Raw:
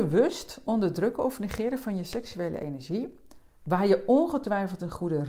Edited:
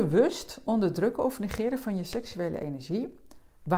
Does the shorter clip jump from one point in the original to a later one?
no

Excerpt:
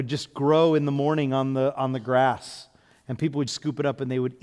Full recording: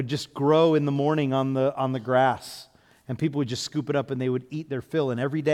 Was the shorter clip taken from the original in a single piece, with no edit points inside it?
no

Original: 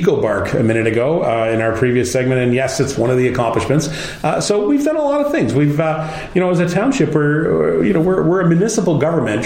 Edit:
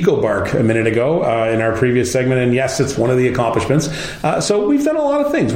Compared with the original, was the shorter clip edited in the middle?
no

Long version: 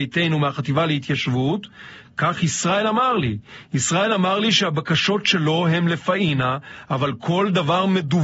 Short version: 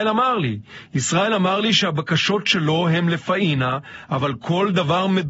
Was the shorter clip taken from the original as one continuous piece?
yes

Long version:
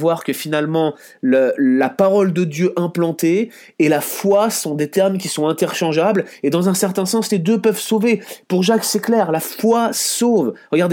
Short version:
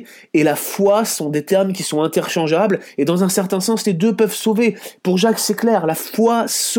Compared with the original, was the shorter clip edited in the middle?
no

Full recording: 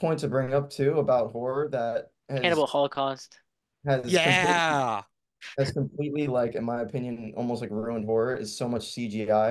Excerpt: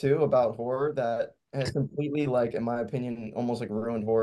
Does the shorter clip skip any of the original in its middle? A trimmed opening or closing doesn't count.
yes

